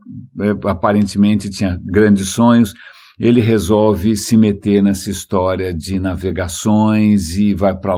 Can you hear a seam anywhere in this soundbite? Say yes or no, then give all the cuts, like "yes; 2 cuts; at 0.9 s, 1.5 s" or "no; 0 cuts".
no; 0 cuts